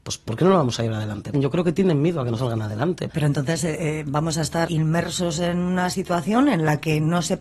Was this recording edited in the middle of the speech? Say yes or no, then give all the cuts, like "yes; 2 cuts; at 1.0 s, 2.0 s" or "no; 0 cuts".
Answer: yes; 3 cuts; at 1.3 s, 3.1 s, 4.7 s